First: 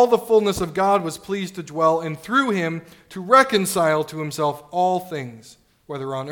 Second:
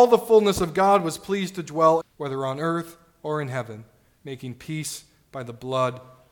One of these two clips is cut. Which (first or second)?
second